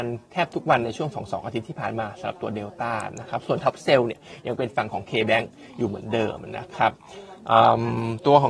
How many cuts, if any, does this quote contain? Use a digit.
0